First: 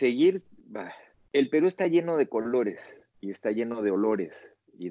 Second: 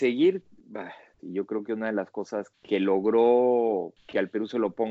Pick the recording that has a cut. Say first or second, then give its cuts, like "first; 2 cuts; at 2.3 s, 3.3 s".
second; 2 cuts; at 1.2 s, 2.5 s